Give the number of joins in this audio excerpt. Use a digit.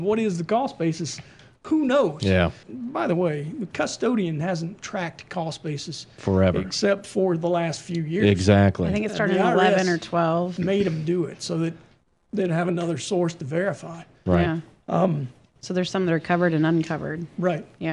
2